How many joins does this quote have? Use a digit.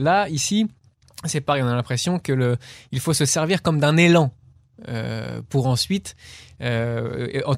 0